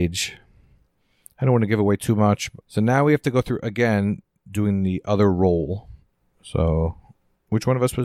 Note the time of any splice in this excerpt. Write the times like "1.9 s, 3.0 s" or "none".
2.6 s